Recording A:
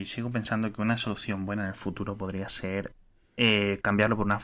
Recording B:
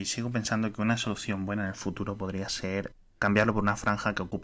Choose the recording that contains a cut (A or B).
B